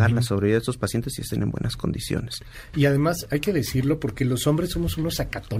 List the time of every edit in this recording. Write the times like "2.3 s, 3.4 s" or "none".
none